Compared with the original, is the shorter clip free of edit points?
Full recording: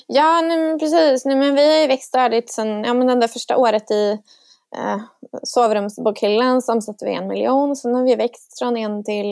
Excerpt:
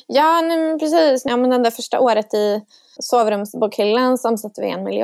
no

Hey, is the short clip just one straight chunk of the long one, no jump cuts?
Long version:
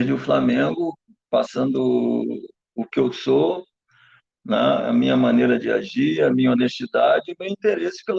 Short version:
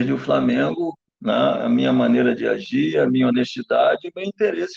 no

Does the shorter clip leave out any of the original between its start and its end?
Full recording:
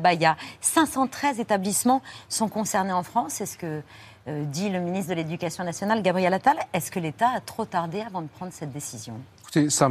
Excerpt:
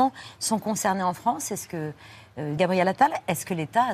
yes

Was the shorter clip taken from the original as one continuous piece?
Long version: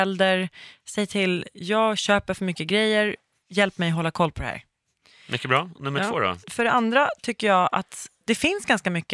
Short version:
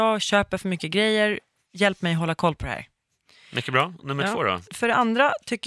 yes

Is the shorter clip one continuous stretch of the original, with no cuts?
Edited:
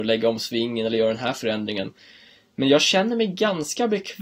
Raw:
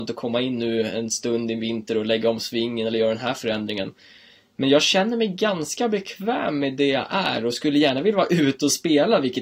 yes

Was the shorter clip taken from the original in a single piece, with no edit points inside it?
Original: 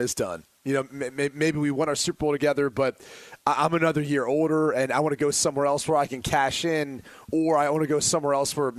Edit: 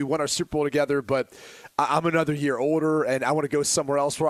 yes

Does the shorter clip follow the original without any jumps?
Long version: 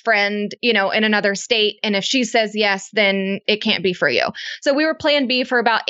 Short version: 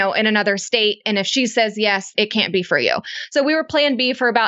no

